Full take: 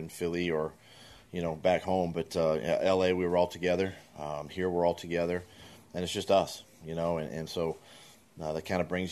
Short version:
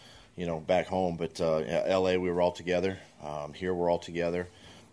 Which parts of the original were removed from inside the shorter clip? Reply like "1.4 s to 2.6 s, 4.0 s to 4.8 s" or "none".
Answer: none